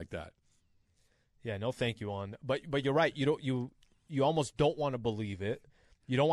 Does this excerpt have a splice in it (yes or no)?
no